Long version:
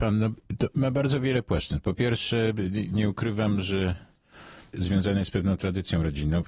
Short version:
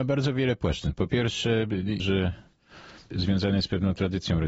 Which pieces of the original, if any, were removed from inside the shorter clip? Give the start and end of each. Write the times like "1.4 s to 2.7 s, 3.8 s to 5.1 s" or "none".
2.9 s to 3.6 s